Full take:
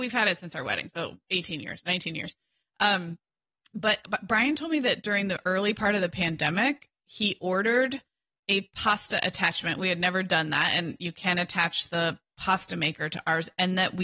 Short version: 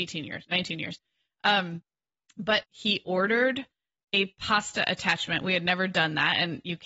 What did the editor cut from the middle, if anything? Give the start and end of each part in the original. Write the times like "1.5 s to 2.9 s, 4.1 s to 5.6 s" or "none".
4.0 s to 7.0 s